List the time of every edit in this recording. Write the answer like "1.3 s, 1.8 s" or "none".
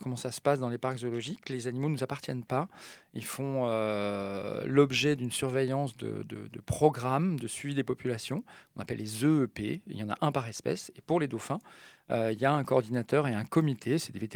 none